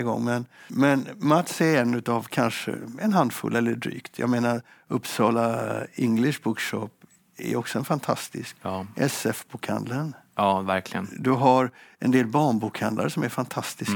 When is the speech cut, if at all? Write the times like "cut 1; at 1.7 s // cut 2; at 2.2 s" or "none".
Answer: none

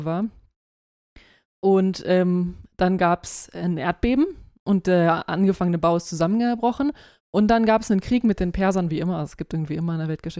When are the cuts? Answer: none

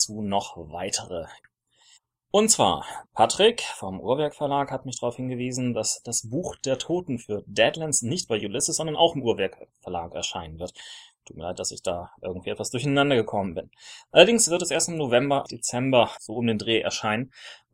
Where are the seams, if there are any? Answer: none

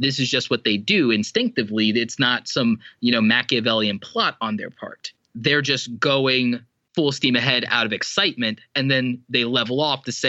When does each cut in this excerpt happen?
none

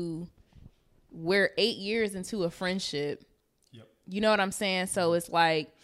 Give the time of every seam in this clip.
none

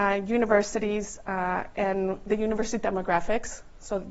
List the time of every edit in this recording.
none

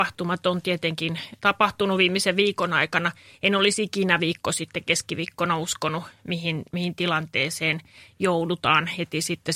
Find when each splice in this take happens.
cut 1; at 1.4 s

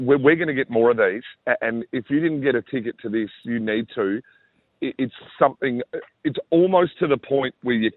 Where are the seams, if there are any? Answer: none

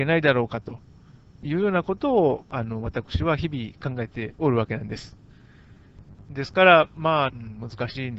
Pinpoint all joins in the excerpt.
cut 1; at 7.3 s

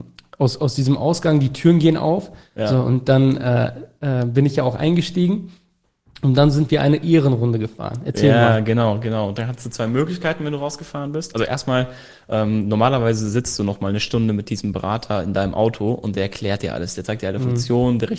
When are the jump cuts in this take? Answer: none

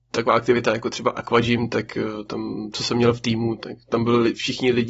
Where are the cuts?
none

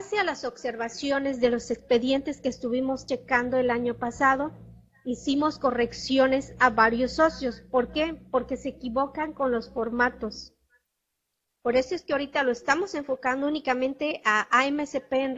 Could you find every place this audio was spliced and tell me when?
none

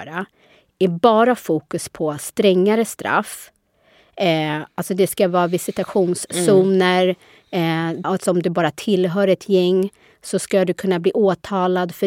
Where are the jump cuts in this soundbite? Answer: cut 1; at 8.0 s

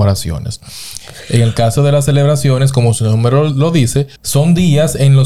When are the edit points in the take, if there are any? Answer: cut 1; at 4.2 s

